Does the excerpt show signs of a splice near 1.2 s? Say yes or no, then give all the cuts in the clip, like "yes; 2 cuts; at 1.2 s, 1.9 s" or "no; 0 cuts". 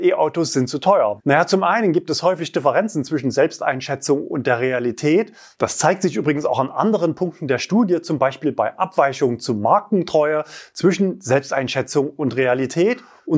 yes; 1 cut; at 1.2 s